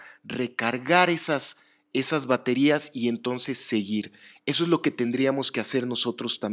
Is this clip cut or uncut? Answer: uncut